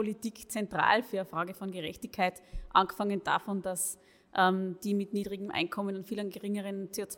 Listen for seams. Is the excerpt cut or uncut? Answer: uncut